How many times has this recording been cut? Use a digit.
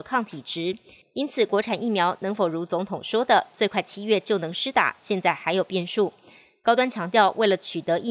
1